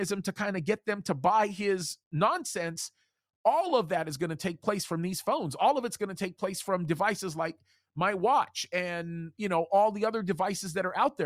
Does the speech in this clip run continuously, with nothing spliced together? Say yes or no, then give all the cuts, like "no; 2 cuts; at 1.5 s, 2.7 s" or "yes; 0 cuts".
yes; 0 cuts